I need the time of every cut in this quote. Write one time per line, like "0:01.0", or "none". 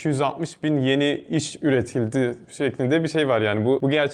none